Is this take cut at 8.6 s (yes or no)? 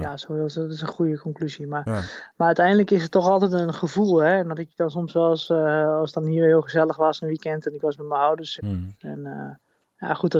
yes